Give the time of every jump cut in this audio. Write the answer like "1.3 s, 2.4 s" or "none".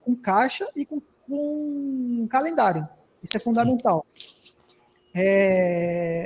none